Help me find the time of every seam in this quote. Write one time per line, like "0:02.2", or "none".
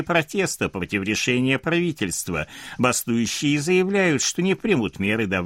none